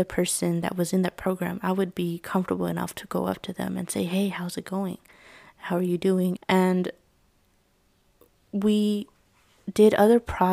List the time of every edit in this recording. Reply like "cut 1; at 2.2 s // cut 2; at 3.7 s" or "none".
cut 1; at 6.4 s